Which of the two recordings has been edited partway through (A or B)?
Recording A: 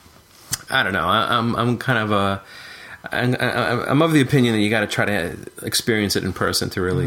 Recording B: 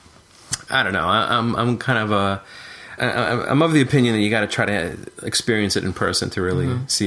B